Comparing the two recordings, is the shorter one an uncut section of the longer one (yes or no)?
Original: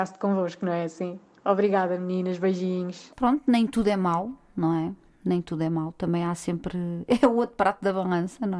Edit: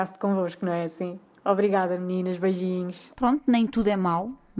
yes